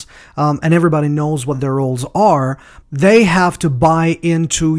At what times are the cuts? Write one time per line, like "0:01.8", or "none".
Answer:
0:02.8